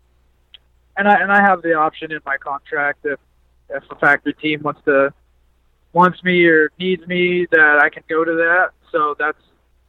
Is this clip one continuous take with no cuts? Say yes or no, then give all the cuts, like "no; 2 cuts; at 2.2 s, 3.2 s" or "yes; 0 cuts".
no; 1 cut; at 5.8 s